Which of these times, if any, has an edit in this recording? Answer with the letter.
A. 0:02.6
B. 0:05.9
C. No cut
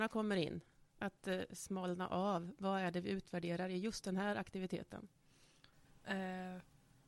B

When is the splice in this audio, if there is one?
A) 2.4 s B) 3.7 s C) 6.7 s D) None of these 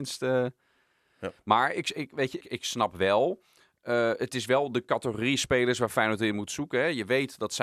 A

